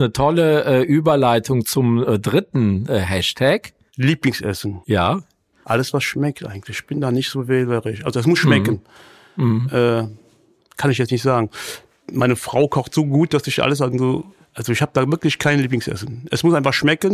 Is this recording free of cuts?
no; 1 cut; at 5.5 s

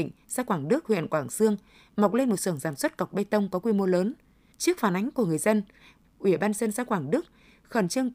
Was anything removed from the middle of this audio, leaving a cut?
yes; 2 cuts; at 4.5 s, 6.0 s

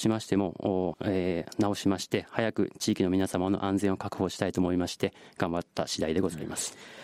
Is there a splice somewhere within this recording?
yes; 1 cut; at 0.9 s

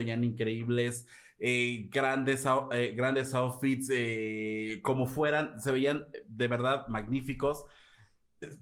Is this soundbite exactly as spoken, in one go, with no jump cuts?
yes; 0 cuts

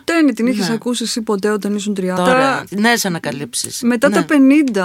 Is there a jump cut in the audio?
yes; 1 cut; at 2.2 s

